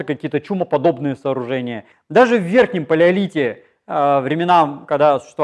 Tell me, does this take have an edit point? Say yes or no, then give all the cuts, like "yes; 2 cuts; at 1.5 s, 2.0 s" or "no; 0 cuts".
yes; 1 cut; at 1.9 s